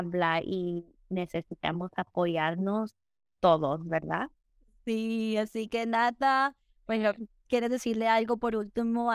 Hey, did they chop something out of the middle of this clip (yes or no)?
no